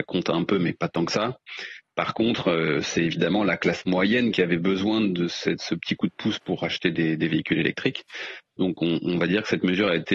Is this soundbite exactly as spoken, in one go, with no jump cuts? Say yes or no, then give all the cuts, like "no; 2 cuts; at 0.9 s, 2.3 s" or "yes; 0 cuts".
yes; 0 cuts